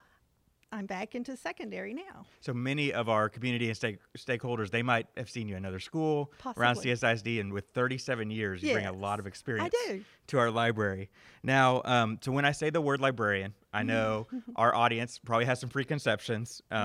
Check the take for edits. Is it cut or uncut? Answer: uncut